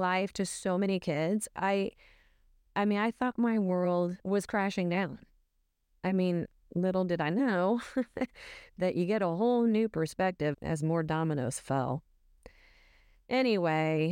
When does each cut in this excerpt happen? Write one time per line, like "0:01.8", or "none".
0:04.2
0:10.5